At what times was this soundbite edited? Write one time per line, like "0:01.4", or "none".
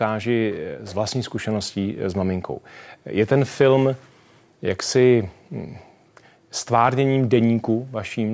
none